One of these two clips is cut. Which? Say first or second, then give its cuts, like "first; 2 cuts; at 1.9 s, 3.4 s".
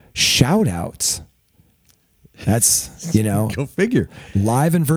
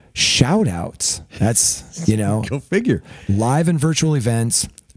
second; 1 cut; at 1.3 s